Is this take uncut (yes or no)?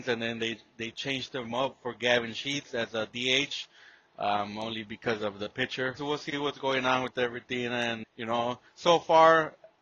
no